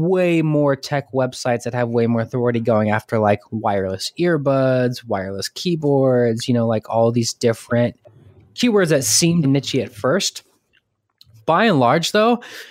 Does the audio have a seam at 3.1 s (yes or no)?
no